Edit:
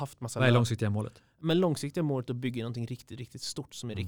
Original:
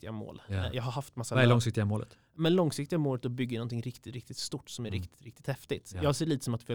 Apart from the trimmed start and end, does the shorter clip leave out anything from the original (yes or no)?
no